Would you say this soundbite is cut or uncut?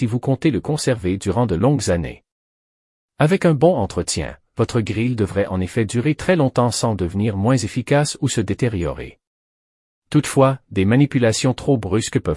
uncut